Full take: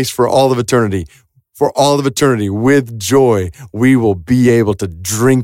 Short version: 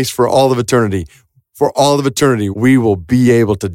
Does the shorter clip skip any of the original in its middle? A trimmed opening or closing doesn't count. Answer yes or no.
yes